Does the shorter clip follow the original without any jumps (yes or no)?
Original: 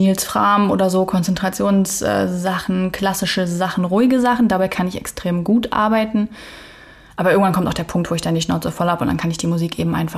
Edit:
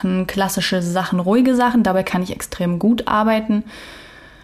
yes